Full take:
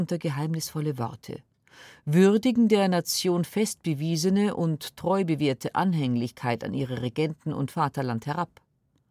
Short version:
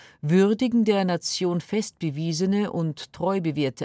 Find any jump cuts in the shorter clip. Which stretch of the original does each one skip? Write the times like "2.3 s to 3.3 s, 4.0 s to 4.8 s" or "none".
none